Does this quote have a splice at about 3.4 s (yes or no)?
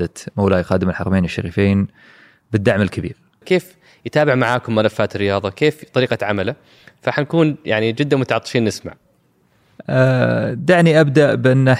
yes